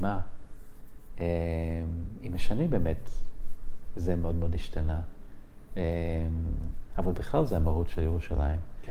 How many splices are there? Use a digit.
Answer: 1